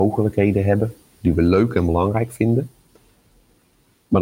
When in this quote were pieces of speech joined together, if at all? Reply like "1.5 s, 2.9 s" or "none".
1.1 s